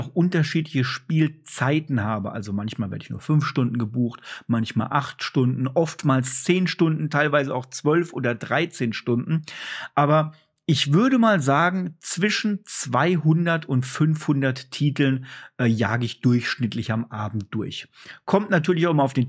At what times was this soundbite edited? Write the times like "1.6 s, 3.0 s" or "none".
none